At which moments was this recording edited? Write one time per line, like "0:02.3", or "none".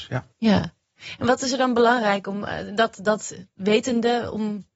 none